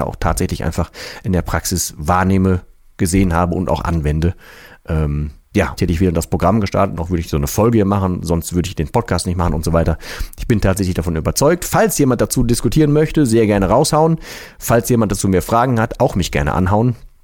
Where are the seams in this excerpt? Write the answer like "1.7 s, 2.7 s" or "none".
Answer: 5.8 s